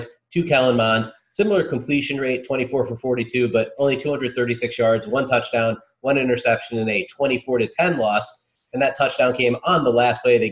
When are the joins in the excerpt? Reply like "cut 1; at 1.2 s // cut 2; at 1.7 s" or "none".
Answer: none